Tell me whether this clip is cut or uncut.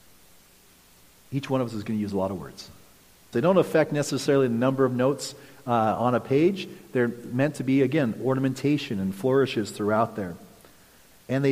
cut